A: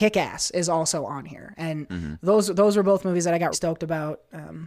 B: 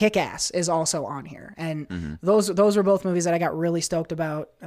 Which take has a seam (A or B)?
A